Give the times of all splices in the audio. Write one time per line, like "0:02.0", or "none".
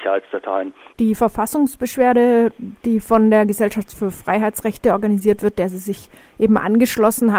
0:00.9